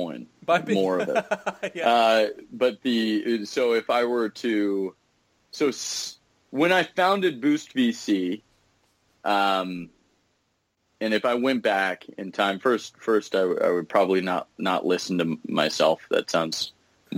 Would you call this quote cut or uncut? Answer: uncut